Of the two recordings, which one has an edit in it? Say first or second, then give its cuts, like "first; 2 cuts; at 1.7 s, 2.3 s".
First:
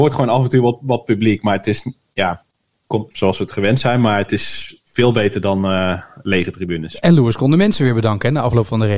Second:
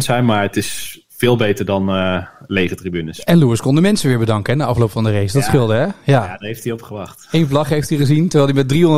first; 1 cut; at 3.1 s